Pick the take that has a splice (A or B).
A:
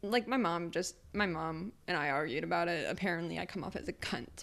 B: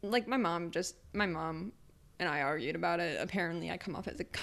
A